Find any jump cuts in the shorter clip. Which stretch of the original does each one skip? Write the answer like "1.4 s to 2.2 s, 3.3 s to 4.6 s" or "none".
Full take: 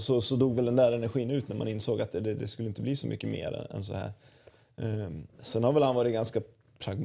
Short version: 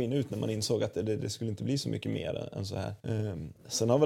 4.2 s to 4.7 s